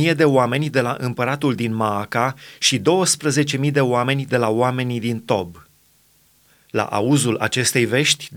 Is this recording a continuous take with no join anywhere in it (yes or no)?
yes